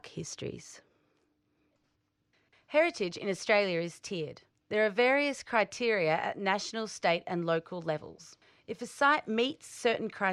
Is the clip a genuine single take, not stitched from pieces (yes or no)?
yes